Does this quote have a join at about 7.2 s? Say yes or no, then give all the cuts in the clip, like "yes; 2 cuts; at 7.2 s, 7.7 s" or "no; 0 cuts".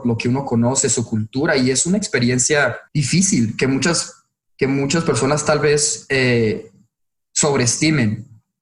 no; 1 cut; at 2.9 s